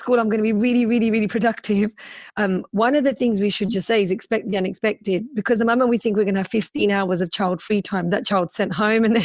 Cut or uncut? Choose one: uncut